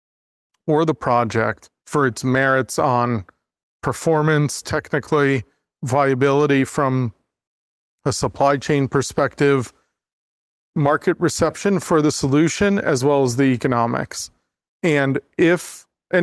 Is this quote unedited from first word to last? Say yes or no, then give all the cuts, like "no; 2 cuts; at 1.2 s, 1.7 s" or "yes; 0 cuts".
yes; 0 cuts